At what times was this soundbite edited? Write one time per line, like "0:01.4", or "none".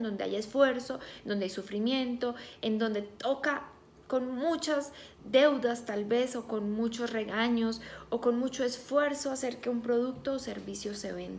0:05.2

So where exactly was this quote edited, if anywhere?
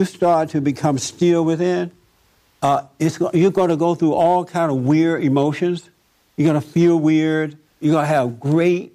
0:07.8

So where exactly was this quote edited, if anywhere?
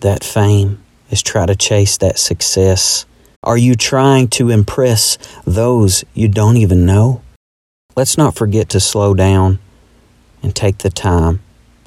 0:03.3
0:07.7

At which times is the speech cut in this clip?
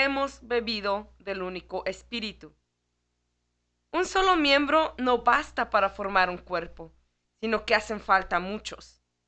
none

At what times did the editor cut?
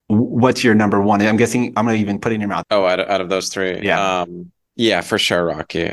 0:02.6

